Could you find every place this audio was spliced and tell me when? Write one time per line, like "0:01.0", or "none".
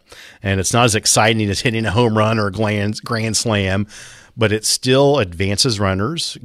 none

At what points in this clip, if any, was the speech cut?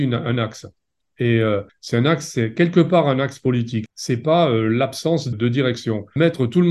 none

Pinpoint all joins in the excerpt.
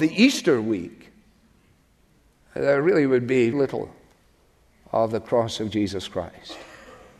0:03.5

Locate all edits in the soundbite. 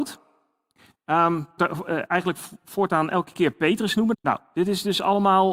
0:01.6
0:04.1

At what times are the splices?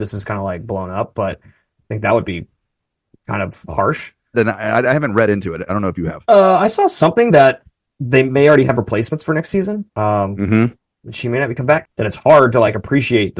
0:04.3
0:09.9
0:11.8

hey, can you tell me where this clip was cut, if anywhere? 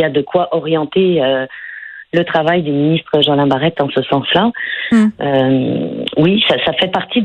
none

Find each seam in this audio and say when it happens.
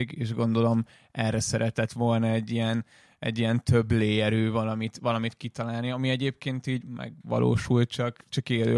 none

